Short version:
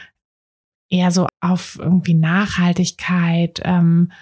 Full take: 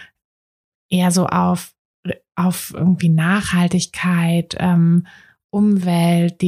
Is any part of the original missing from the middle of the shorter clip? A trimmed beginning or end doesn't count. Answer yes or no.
yes